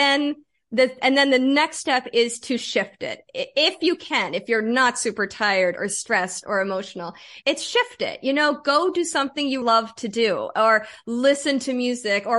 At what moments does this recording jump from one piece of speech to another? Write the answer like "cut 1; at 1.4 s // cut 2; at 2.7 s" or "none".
cut 1; at 7.4 s // cut 2; at 9.6 s